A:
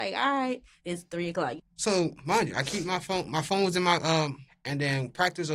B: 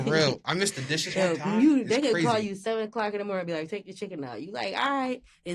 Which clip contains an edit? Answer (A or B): A